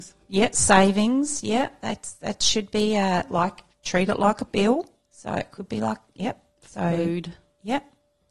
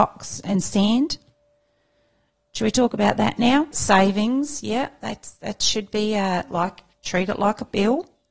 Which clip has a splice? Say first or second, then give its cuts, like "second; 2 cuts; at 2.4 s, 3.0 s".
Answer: second; 1 cut; at 3.7 s